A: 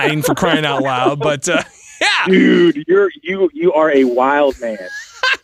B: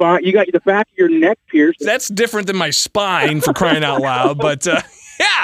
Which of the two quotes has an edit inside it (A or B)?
B